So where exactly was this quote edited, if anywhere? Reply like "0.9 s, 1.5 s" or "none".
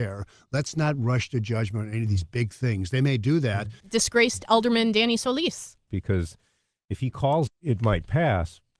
3.8 s, 5.9 s, 7.5 s

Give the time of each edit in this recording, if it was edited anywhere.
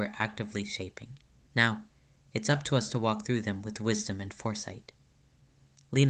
1.5 s

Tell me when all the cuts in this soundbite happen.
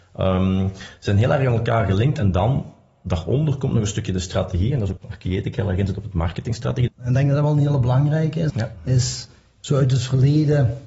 5.0 s, 6.9 s, 8.5 s

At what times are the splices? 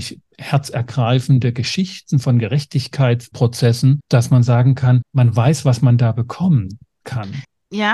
none

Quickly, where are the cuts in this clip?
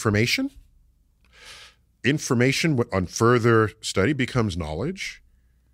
none

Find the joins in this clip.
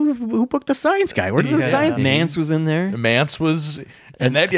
2.0 s

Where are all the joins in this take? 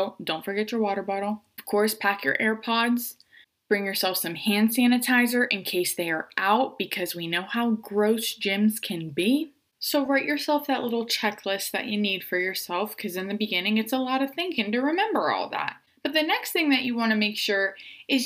none

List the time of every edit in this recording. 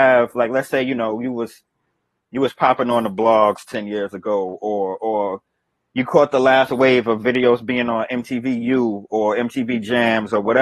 none

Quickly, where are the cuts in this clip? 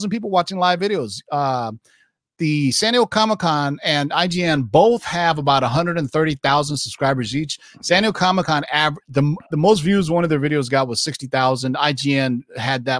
none

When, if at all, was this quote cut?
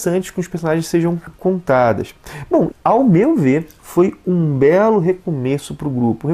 2.7 s

